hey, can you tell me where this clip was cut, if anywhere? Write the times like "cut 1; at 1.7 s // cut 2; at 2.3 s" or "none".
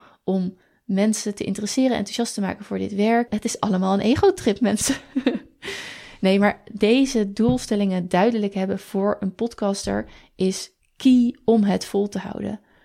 cut 1; at 3.3 s